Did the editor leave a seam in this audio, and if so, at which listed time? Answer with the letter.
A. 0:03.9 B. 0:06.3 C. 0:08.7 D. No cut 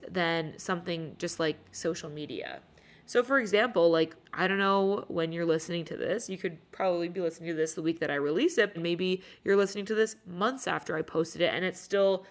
C